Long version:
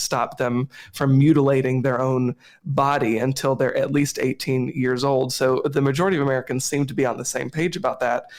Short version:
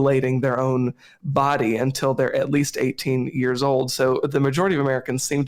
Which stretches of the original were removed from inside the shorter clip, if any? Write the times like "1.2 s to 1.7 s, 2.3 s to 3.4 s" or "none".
none